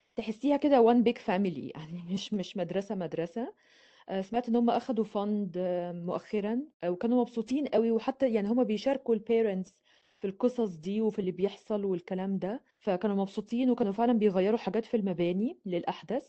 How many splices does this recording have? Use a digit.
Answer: 2